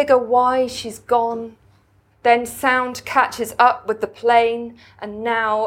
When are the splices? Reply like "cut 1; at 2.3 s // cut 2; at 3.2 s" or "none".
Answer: cut 1; at 2.1 s